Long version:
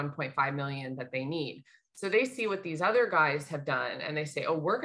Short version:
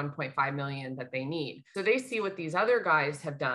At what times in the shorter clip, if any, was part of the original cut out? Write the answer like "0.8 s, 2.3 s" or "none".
1.7 s